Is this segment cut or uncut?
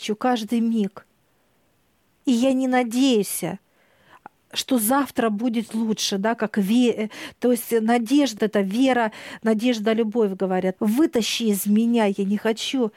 cut